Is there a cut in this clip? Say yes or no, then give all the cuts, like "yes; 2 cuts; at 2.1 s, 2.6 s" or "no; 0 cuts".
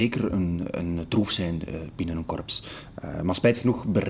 no; 0 cuts